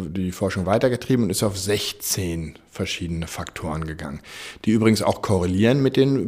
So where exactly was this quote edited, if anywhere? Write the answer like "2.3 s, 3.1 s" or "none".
none